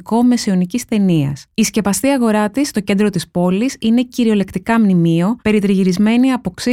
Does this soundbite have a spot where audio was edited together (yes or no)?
yes